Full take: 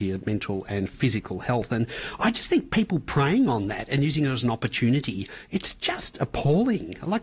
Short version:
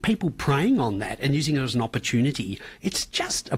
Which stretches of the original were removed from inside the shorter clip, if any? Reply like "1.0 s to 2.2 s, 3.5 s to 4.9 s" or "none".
none